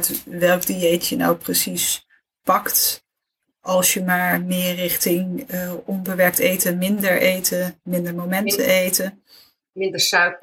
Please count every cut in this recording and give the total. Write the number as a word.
zero